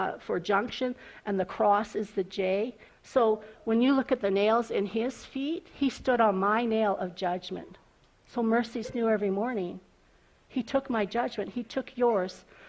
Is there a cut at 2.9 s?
yes; 1 cut; at 2.9 s

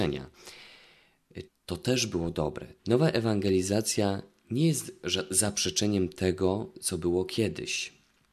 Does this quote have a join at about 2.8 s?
yes; 2 cuts; at 1.5 s, 2.8 s

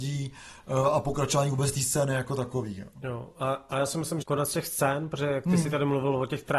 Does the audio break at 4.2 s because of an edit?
yes; 1 cut; at 4.2 s

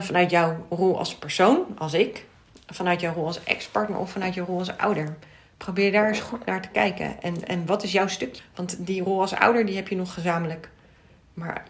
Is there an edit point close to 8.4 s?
yes; 1 cut; at 8.4 s

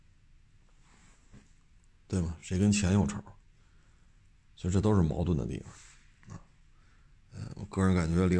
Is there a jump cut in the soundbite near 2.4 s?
no; 0 cuts

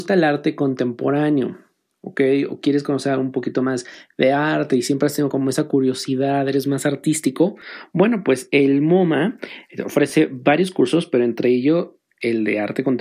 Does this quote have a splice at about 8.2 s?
no; 0 cuts

